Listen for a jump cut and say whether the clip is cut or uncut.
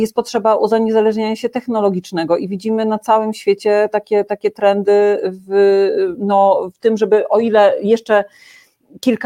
uncut